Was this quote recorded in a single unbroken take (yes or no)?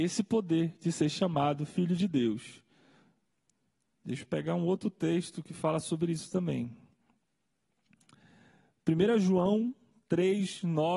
yes